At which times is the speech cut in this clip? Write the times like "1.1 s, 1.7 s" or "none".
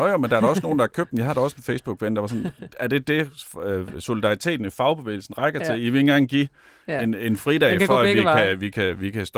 none